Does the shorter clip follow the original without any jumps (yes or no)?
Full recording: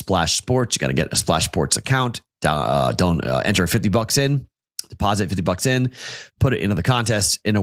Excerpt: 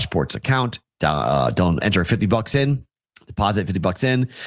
no